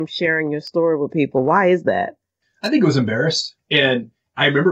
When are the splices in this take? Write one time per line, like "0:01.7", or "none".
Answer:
0:03.6